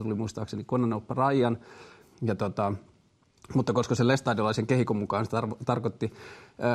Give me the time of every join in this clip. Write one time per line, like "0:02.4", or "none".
0:02.0